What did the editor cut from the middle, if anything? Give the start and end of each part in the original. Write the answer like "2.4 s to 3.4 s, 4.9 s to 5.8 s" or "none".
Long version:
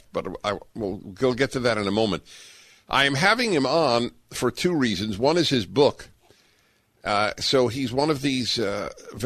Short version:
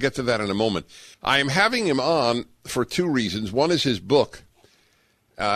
2.5 s to 2.8 s